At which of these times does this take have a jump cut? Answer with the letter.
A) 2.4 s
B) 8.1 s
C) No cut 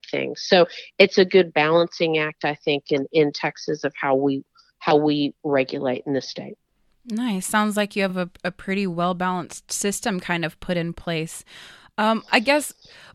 C